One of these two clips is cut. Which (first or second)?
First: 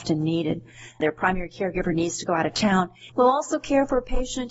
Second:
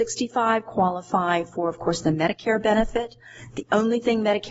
first